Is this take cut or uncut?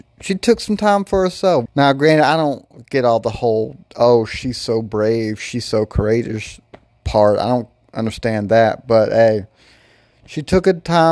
cut